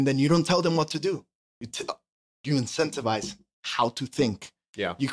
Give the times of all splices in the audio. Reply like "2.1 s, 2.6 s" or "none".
none